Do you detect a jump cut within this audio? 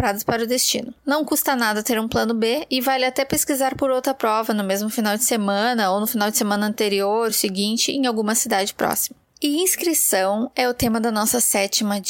no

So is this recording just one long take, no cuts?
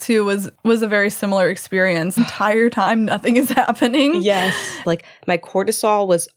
no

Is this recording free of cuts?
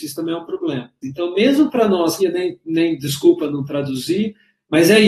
no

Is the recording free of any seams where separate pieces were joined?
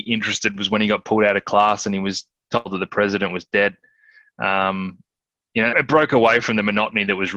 no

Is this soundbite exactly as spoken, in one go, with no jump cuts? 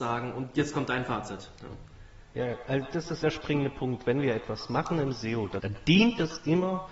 no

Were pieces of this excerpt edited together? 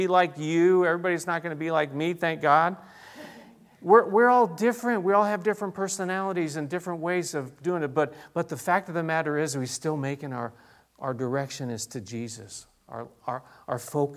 no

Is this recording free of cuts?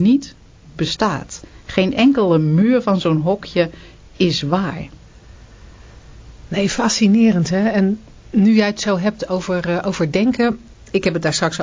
yes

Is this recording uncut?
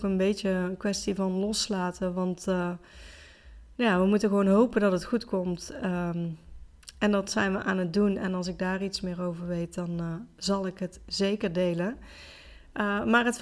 yes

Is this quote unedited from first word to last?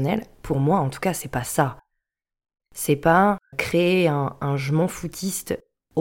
no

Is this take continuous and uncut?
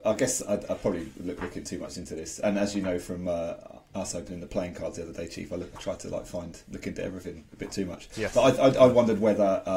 yes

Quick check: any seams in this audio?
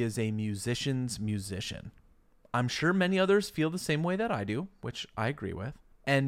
no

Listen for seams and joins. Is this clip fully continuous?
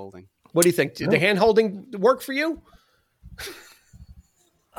yes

